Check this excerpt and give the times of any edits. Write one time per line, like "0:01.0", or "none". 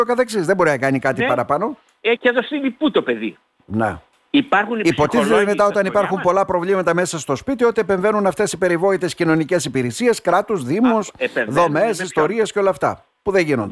0:02.2

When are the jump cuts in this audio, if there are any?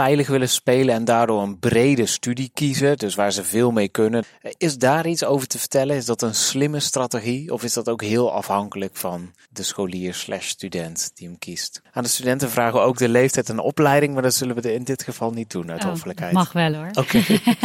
0:11.9

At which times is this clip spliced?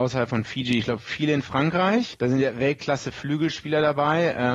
0:02.1

